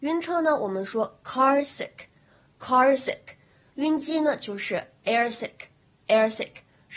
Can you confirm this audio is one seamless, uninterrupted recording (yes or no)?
yes